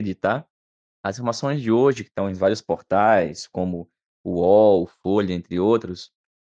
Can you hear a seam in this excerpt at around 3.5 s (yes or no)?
no